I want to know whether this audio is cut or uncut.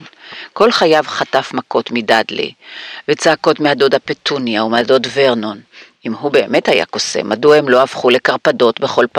uncut